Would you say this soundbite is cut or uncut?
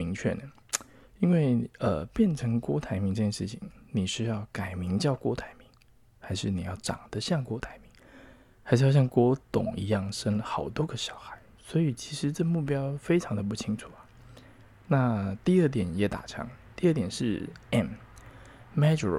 uncut